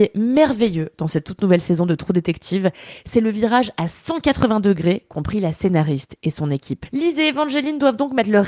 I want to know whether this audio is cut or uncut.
cut